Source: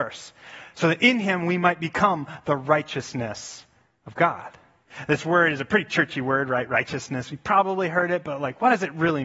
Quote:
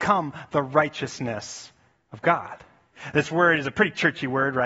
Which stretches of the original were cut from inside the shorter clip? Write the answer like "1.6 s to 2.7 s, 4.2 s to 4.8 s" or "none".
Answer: none

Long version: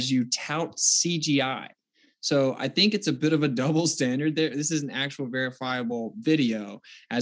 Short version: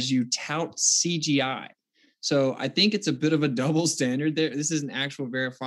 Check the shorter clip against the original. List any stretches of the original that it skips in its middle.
none

